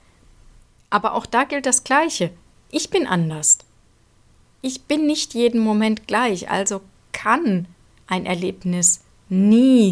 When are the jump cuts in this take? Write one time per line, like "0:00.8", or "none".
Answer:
none

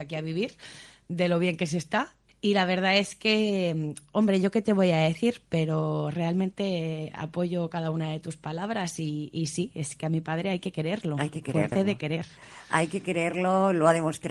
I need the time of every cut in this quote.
0:11.7

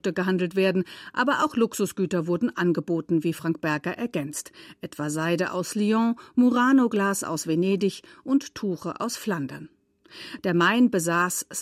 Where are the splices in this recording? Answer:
0:10.4

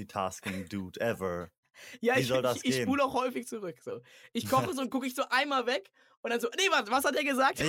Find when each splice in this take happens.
none

